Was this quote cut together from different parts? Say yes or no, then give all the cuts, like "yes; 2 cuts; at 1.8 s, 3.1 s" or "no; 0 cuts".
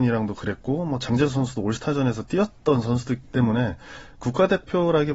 yes; 1 cut; at 3.2 s